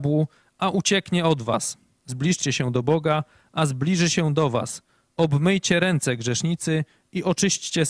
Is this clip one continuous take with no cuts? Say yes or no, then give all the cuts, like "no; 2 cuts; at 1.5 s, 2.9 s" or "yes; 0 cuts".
yes; 0 cuts